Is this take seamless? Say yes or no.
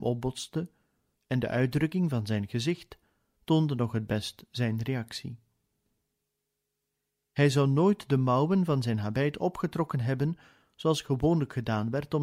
no